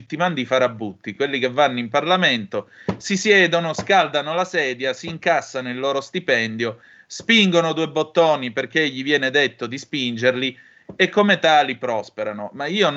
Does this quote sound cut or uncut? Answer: uncut